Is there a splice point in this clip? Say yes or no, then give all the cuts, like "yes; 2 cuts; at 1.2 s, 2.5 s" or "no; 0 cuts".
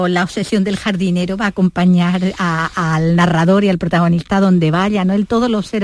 no; 0 cuts